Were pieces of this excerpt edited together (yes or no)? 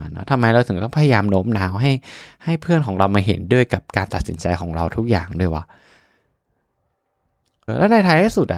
yes